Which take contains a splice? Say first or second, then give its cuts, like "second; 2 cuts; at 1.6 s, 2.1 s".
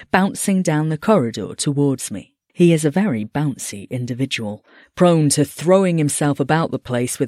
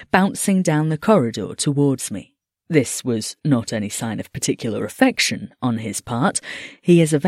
first; 1 cut; at 2.5 s